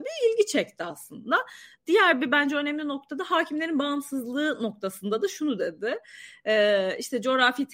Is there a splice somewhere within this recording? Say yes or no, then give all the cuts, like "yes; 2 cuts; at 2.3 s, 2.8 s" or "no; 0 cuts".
no; 0 cuts